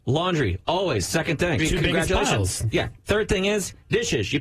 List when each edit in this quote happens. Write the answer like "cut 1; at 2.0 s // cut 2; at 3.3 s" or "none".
cut 1; at 1.6 s // cut 2; at 3.1 s